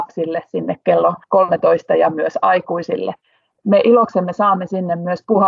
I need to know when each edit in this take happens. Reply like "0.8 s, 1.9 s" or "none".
none